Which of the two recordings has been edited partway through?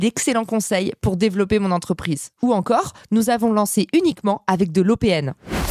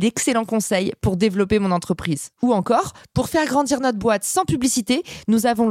first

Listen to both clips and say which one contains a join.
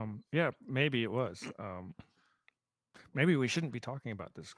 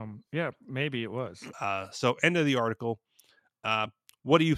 second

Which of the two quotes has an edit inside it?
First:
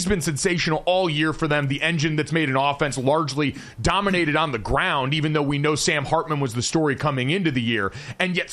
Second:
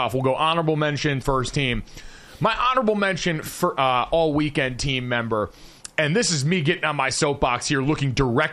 second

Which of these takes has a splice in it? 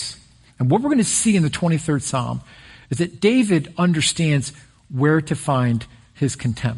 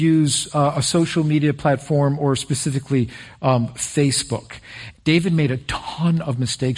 second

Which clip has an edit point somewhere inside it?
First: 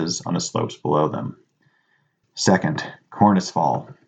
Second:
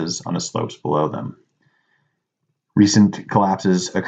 first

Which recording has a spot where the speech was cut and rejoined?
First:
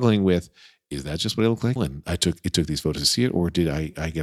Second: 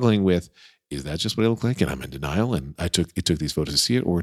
first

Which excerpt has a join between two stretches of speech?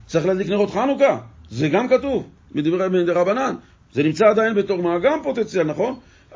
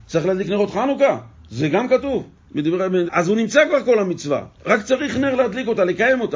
second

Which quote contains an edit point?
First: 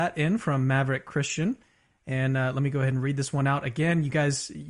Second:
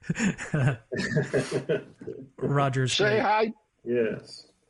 second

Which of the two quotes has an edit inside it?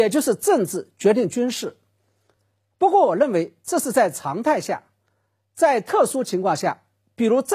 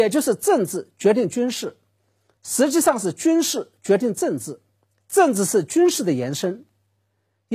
second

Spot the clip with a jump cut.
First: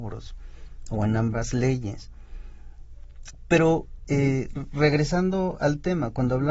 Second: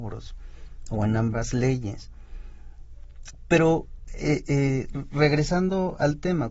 first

